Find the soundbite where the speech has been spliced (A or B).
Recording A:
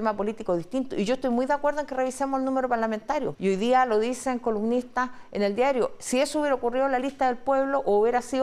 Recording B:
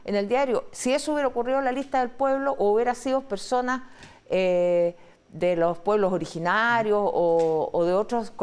A